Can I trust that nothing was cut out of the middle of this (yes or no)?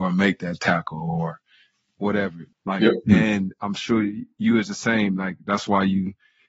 no